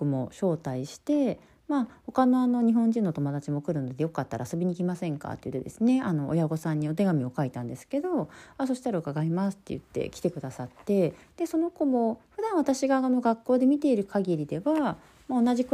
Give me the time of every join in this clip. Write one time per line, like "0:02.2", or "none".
0:11.2